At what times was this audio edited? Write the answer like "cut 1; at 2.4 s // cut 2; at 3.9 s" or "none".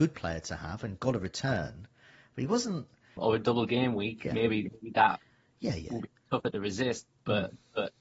cut 1; at 3.2 s